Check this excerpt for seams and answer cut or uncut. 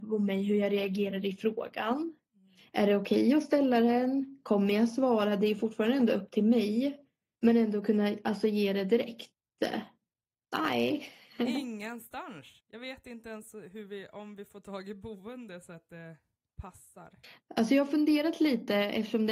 cut